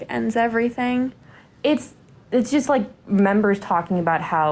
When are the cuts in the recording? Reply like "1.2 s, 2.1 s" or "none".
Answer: none